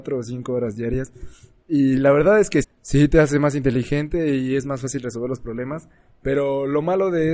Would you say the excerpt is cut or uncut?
cut